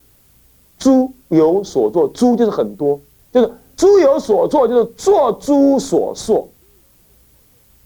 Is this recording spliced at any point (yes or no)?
no